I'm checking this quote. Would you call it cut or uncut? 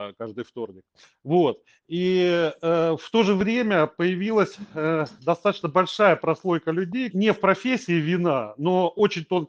cut